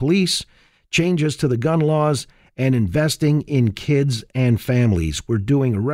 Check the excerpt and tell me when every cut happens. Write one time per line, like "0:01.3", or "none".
none